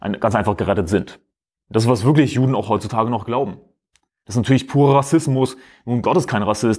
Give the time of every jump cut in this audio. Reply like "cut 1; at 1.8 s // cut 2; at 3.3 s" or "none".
none